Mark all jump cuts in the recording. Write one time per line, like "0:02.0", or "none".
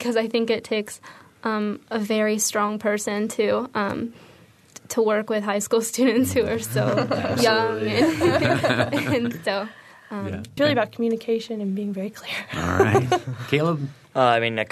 0:10.6